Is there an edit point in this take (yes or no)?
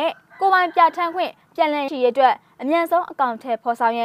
yes